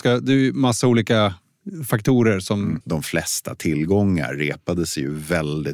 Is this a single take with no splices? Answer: no; 1 cut; at 2.8 s

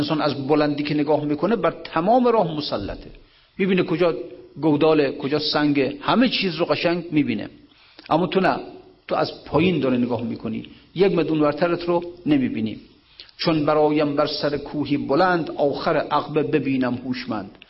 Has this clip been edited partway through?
no; 0 cuts

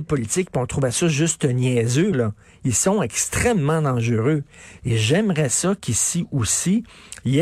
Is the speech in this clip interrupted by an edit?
yes; 2 cuts; at 2.1 s, 4.8 s

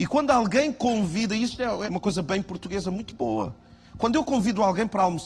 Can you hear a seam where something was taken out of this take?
yes; 1 cut; at 1.8 s

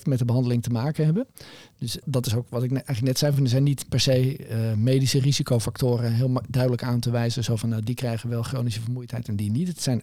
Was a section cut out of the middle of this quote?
no; 0 cuts

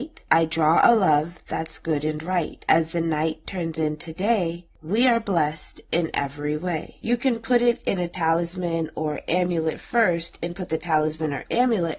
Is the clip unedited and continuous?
no; 1 cut; at 7.0 s

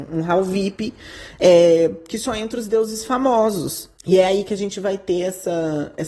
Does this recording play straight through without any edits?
no; 1 cut; at 4.0 s

